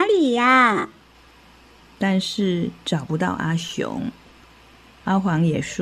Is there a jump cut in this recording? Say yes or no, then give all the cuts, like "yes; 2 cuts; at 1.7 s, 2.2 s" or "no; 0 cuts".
yes; 1 cut; at 4.4 s